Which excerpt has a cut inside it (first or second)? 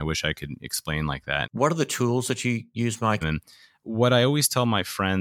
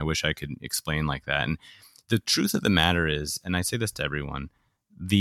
first